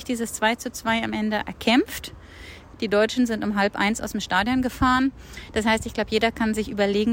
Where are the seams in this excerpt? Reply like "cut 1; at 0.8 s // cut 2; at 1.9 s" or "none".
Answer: cut 1; at 2.7 s